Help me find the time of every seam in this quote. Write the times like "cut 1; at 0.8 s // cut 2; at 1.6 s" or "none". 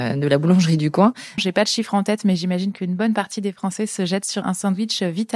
cut 1; at 1.4 s // cut 2; at 4.4 s